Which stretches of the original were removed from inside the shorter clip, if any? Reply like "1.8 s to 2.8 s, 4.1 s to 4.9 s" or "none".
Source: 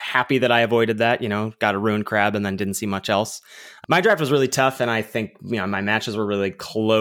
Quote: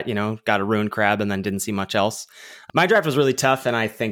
none